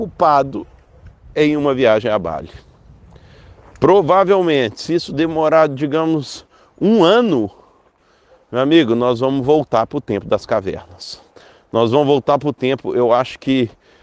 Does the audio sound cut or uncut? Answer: uncut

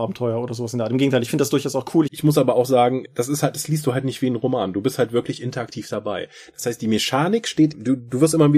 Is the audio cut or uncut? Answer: cut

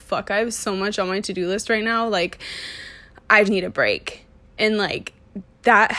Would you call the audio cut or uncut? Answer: cut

